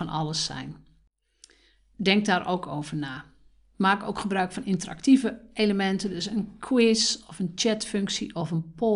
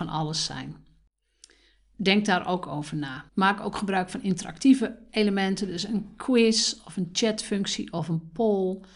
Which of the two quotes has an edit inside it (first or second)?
second